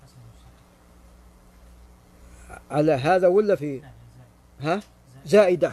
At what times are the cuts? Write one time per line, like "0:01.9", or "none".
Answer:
0:03.6

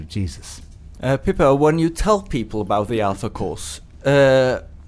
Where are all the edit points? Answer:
0:00.9

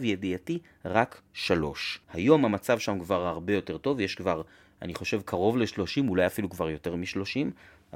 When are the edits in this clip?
0:02.0

